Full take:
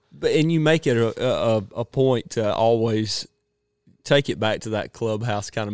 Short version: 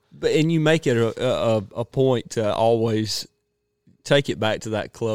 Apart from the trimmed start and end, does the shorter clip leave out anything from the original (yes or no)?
no